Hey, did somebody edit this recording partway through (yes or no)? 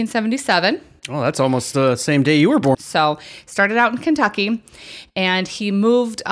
yes